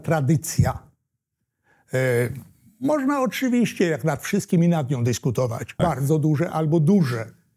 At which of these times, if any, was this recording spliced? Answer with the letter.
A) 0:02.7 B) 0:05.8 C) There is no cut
B